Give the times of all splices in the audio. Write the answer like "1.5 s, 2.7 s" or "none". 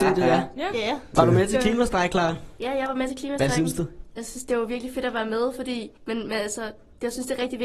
1.1 s, 6.0 s